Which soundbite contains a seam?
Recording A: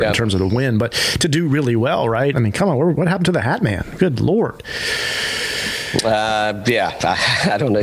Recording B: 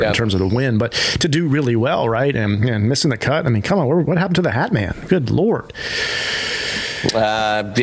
A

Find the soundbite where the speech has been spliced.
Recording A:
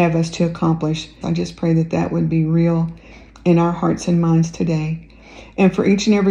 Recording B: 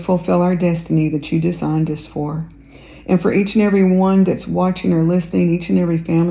A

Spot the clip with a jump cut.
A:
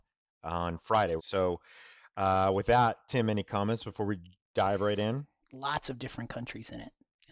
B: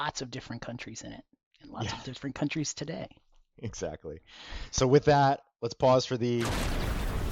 A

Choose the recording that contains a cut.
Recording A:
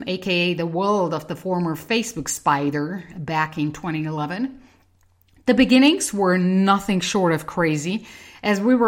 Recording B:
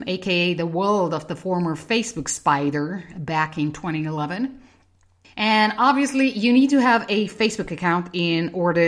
B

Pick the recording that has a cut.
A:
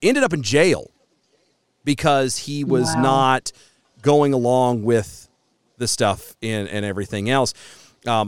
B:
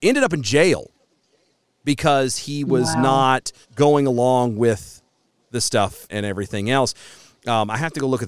B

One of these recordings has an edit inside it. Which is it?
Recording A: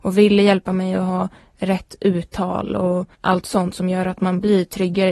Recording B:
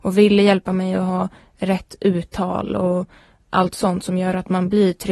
A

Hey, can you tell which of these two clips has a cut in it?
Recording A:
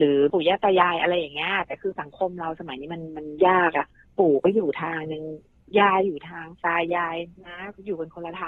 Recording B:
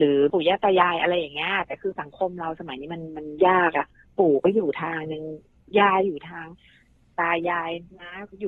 A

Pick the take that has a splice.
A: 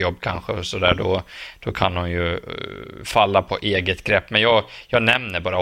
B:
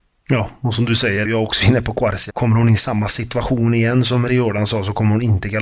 B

